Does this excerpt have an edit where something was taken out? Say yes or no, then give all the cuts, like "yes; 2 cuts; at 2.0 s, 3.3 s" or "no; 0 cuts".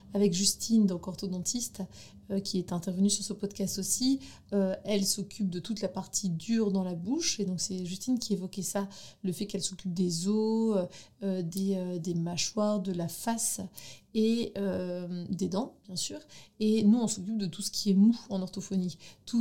no; 0 cuts